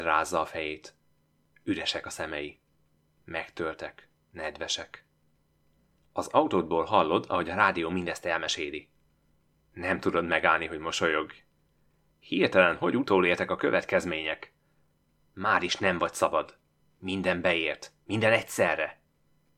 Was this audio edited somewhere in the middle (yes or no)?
no